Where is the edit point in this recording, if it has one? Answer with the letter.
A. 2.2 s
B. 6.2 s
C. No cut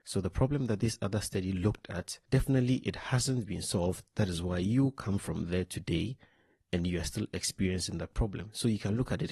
C